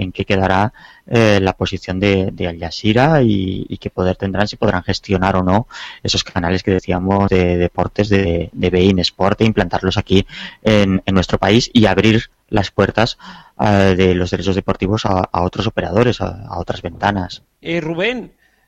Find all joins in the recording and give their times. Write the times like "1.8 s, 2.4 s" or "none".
17.5 s